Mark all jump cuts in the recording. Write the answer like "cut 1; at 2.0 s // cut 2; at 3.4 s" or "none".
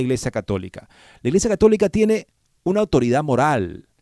none